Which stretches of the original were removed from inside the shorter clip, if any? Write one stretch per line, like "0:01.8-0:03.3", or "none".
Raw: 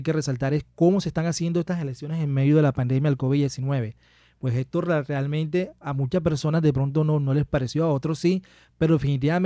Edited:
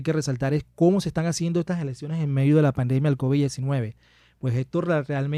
none